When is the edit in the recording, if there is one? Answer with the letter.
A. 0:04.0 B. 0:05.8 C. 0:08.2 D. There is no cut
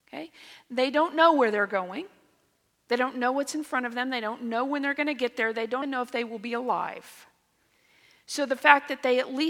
B